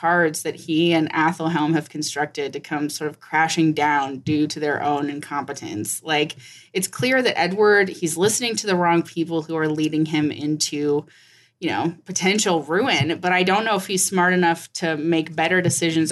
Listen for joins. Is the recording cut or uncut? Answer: uncut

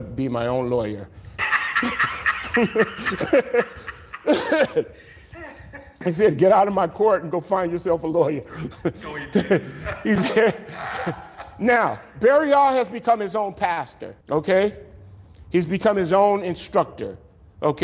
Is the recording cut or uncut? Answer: cut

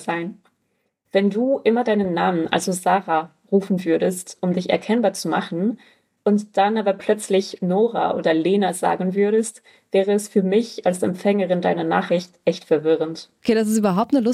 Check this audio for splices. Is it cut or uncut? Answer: uncut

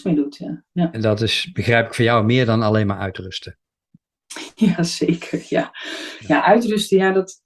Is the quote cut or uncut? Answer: uncut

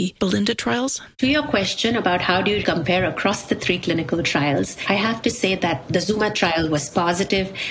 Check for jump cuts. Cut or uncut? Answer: cut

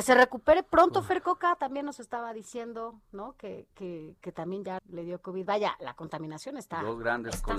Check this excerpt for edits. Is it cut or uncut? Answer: cut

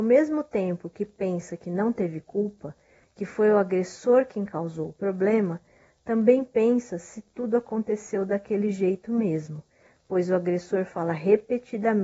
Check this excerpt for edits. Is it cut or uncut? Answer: uncut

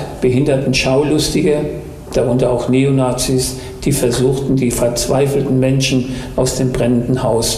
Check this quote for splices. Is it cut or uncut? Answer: cut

